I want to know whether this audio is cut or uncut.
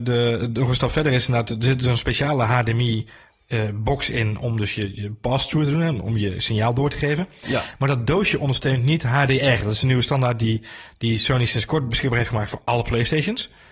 uncut